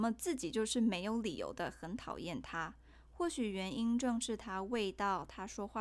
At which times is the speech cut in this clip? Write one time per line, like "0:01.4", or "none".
none